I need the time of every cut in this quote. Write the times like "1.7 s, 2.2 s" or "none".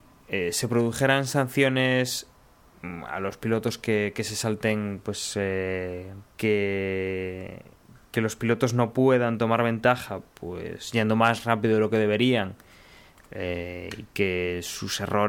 6.2 s